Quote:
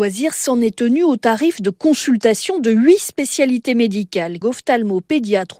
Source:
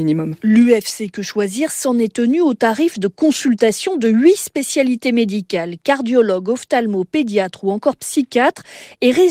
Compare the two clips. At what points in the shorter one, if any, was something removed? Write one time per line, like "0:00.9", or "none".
0:04.4

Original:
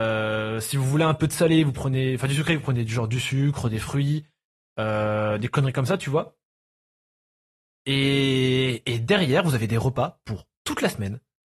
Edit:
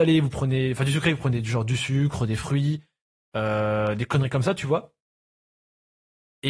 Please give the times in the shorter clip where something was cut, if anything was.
none

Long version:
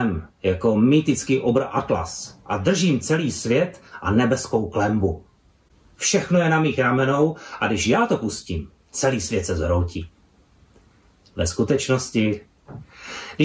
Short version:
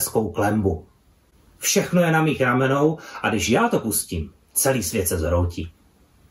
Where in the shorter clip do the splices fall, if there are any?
none

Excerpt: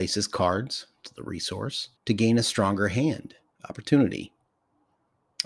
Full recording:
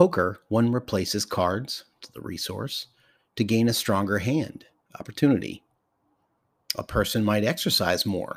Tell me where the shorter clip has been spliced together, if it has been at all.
0:02.0

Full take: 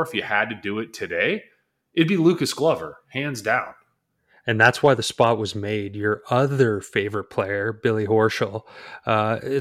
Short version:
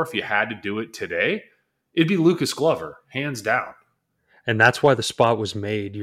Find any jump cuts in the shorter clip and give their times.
none

